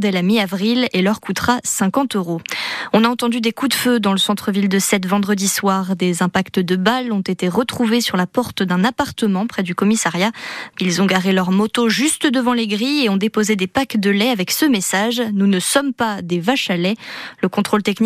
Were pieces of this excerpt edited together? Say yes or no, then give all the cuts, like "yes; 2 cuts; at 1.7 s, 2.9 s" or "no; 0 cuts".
yes; 1 cut; at 10.7 s